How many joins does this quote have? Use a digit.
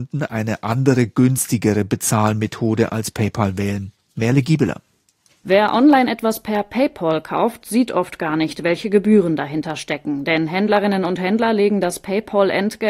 0